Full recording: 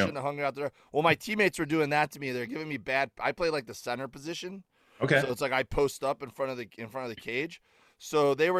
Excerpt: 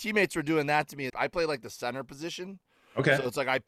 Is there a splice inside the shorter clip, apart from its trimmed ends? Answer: yes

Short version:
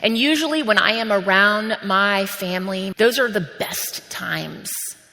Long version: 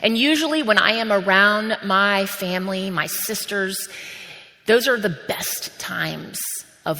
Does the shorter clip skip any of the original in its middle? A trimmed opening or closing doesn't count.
yes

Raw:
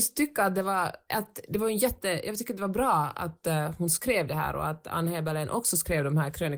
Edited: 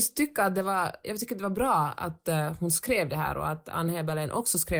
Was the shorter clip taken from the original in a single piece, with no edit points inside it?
no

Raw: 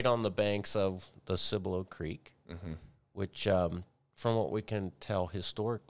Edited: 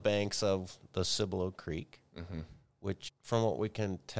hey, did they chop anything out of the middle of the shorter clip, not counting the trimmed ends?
yes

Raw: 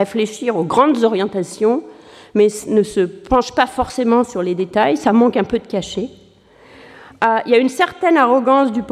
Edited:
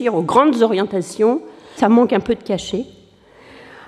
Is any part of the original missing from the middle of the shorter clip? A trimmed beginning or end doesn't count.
yes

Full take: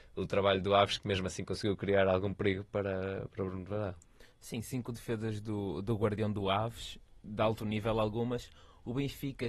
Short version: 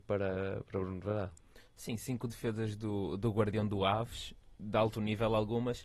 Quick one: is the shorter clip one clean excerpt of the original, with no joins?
yes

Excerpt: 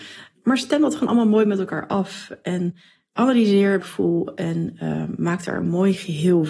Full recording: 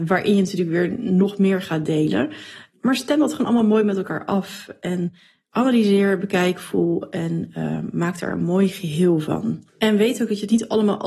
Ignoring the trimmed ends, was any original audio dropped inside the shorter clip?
yes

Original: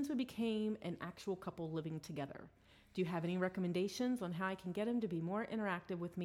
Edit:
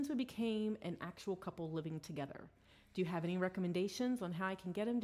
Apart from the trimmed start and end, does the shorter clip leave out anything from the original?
no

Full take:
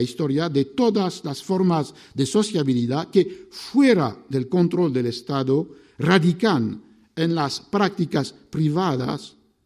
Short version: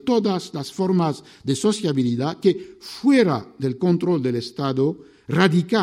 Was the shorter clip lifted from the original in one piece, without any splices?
yes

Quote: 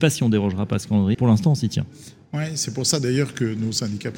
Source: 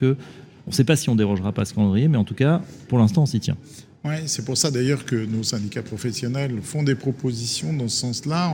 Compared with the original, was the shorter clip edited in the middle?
yes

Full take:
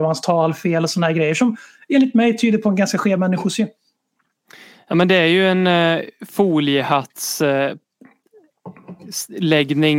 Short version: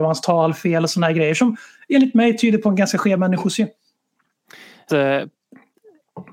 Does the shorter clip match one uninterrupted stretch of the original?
no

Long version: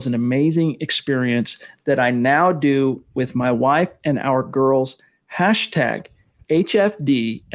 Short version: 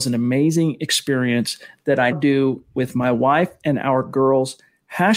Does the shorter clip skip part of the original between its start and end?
yes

